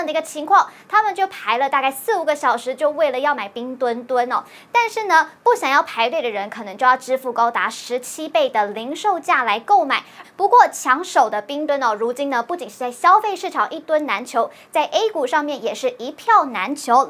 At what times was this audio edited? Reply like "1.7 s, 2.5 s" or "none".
10.2 s, 11.7 s